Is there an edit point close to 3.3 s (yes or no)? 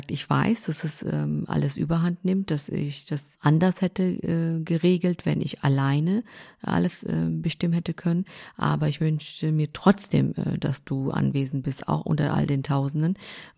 yes